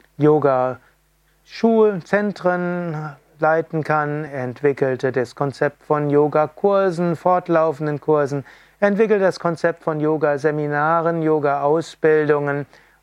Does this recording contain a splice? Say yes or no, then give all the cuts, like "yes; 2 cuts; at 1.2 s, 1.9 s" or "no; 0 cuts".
no; 0 cuts